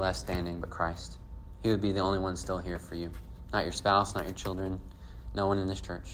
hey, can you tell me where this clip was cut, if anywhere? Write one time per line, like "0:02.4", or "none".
none